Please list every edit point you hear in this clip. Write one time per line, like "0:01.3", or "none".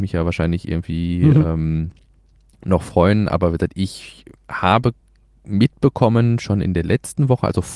none